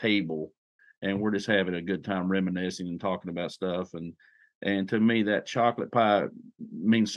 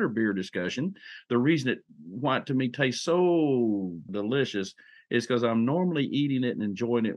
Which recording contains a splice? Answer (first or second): second